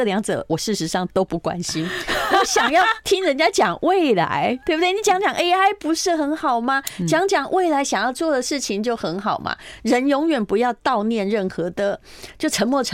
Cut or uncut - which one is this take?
uncut